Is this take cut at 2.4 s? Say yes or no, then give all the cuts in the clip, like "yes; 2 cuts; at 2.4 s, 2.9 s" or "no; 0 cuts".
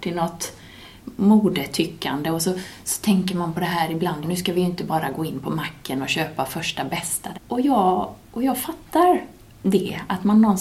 no; 2 cuts; at 4.2 s, 7.3 s